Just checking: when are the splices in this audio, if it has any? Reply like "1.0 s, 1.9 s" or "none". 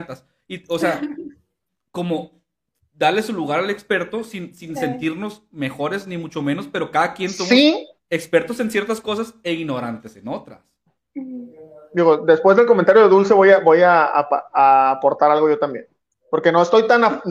none